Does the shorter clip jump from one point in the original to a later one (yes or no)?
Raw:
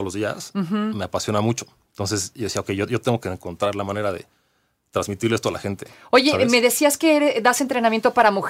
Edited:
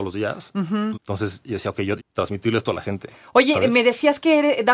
yes